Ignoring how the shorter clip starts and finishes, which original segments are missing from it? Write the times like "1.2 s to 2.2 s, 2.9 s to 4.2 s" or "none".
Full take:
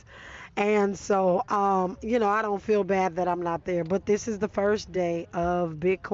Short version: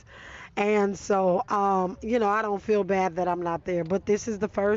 none